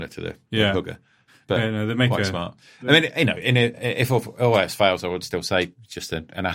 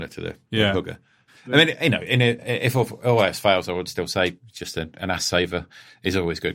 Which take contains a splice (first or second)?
second